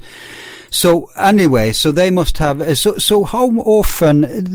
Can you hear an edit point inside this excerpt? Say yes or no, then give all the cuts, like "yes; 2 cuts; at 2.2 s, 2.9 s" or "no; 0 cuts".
no; 0 cuts